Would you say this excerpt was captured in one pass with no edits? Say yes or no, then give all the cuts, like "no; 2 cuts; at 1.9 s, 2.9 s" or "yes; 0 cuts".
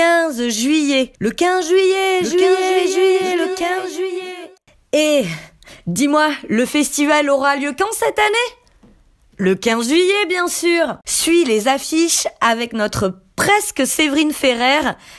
no; 2 cuts; at 1.1 s, 11.0 s